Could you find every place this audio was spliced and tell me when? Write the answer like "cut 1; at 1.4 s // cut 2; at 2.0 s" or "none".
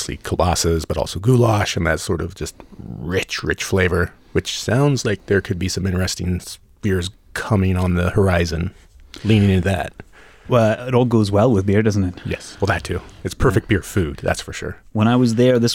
none